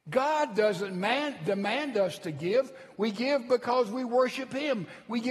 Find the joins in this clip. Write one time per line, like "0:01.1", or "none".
none